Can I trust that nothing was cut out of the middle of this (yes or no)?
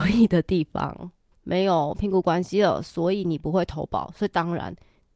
no